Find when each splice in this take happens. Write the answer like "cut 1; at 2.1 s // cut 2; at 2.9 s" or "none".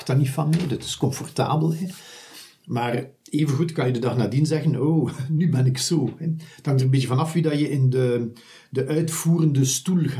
none